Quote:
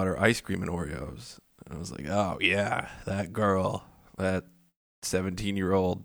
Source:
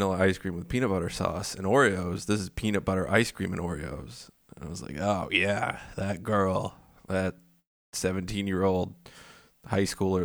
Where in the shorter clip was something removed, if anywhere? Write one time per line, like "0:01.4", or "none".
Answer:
none